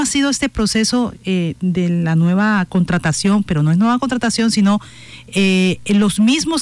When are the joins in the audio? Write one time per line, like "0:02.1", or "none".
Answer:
none

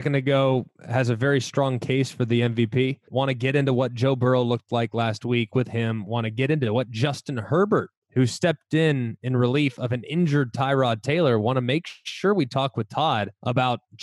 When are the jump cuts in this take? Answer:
0:03.1

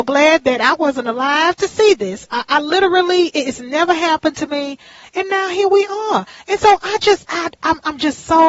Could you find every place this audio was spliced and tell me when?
0:02.2
0:05.0

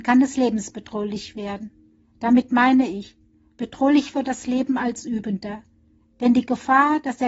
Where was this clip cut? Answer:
none

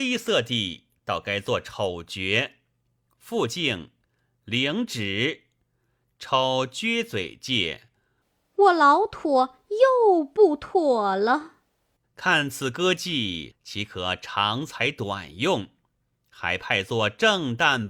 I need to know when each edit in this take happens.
0:12.0
0:13.5

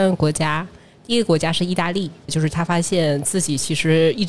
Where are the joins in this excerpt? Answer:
0:02.3

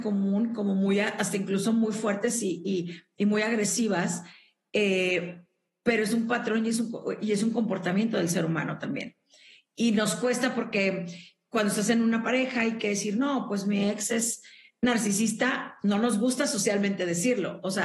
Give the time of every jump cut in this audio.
none

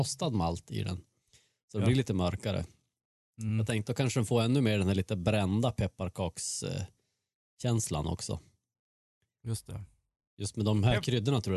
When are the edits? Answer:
none

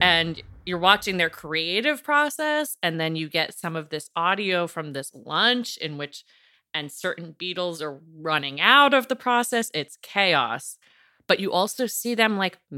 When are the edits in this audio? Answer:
none

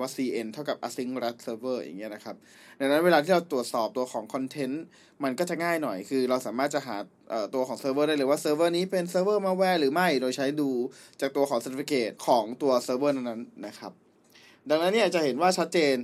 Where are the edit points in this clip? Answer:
0:12.2

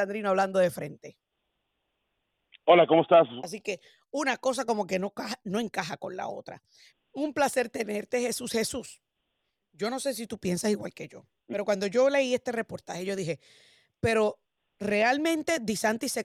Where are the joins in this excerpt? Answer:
0:03.4
0:06.9

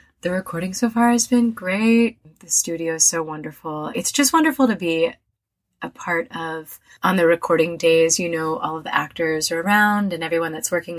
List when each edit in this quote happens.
0:03.9

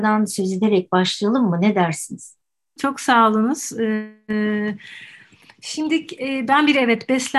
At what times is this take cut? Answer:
0:02.8

